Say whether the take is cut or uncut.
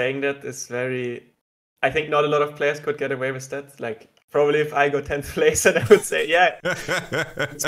uncut